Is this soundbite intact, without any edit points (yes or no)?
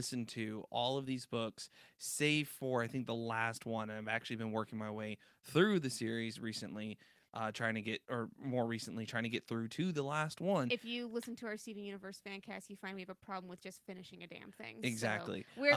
yes